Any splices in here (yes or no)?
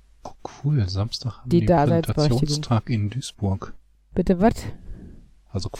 no